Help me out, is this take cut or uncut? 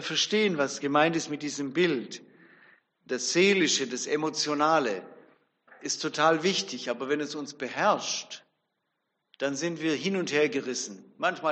uncut